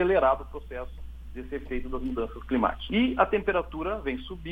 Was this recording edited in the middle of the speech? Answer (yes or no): yes